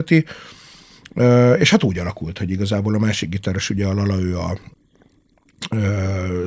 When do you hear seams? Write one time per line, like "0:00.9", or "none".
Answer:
none